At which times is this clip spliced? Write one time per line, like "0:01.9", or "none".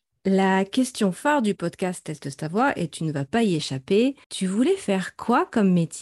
0:04.2